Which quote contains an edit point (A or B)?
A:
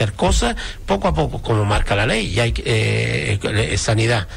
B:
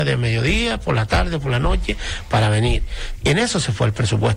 B